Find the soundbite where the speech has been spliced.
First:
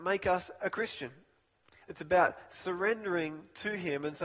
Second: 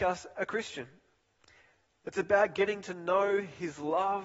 first; 1 cut; at 1.8 s

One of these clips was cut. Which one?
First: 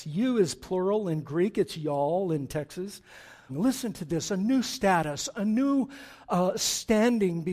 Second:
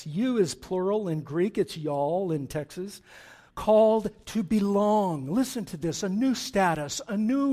first; 1 cut; at 3.5 s

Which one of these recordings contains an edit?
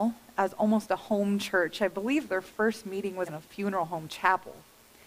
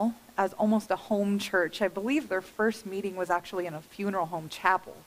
first; 1 cut; at 3.3 s

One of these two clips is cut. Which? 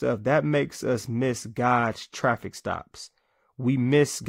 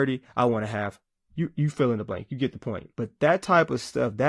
second; 1 cut; at 2.9 s

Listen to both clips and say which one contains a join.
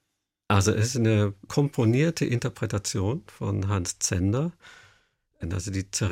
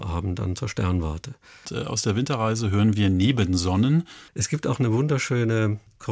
second; 2 cuts; at 1.7 s, 4.3 s

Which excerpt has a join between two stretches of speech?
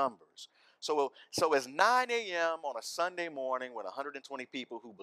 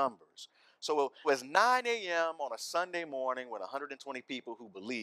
second; 1 cut; at 1.2 s

